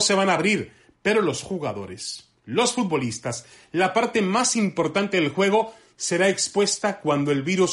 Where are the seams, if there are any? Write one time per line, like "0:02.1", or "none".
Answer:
none